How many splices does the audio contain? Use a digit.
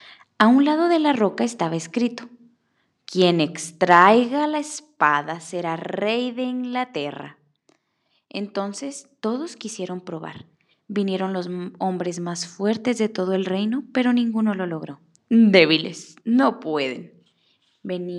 1